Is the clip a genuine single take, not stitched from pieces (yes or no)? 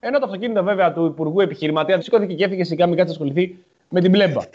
no